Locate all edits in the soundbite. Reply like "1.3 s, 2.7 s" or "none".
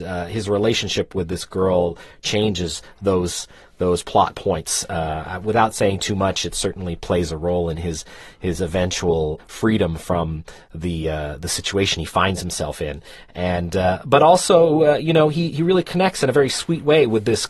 9.4 s

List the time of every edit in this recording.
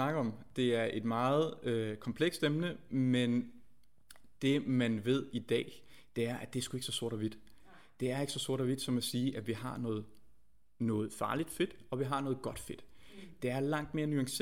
none

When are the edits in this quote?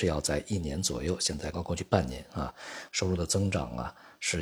1.5 s, 2.9 s

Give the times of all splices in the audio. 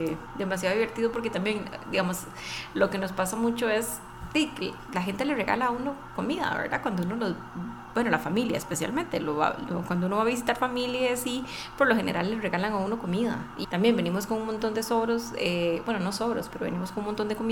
13.6 s

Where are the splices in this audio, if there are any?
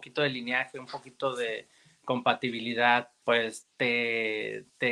3.2 s

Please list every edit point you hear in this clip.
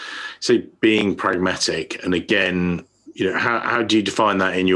none

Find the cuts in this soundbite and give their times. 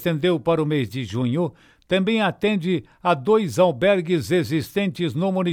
none

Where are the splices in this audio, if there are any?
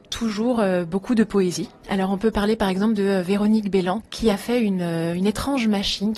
4.0 s

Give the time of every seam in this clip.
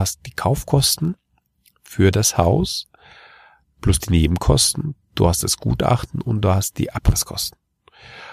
none

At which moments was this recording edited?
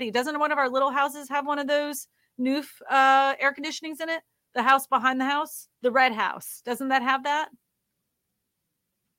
5.7 s

